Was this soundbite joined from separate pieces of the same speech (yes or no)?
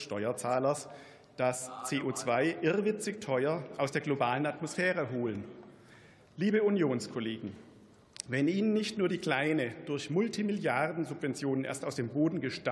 yes